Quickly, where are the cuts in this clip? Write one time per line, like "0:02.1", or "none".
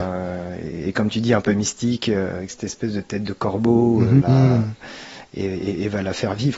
0:04.2